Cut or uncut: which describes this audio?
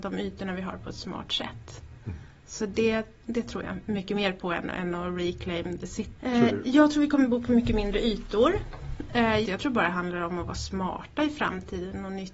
cut